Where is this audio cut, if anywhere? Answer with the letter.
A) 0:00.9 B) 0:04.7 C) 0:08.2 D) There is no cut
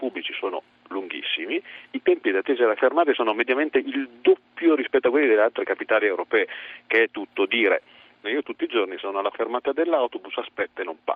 C